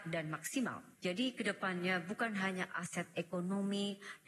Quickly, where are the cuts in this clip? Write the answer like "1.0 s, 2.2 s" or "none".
none